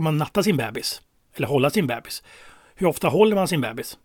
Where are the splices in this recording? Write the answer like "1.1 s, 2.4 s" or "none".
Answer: none